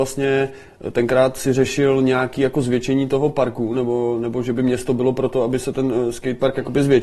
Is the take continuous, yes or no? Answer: yes